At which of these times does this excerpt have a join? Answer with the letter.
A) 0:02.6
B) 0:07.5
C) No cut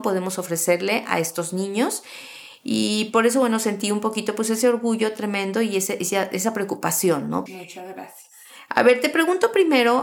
B